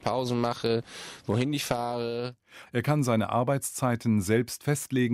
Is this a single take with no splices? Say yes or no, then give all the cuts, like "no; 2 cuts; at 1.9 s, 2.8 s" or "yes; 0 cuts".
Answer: no; 1 cut; at 2.7 s